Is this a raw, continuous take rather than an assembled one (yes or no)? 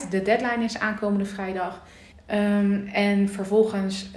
no